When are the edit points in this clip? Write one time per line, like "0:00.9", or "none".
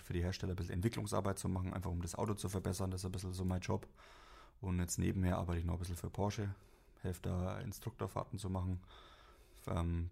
none